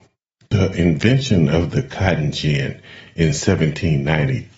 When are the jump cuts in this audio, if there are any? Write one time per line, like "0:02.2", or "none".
none